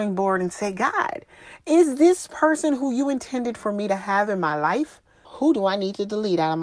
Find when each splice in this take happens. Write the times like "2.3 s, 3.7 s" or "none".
5.2 s